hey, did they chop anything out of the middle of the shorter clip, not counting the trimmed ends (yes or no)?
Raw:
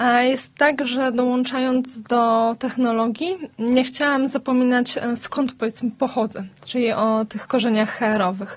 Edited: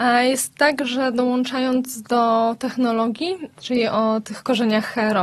yes